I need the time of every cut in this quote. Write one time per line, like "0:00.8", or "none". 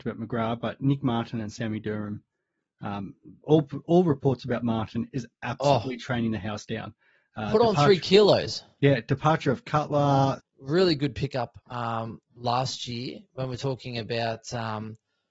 0:10.4
0:12.3